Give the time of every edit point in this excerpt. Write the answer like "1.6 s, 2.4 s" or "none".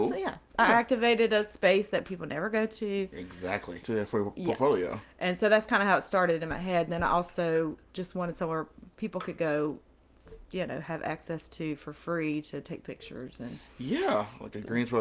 3.8 s